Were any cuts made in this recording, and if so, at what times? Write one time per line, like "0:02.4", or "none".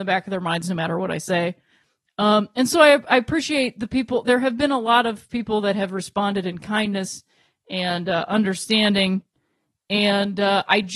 none